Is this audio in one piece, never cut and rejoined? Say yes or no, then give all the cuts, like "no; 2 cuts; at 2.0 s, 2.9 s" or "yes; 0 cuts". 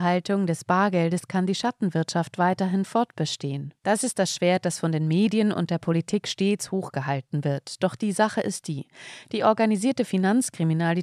no; 1 cut; at 3.8 s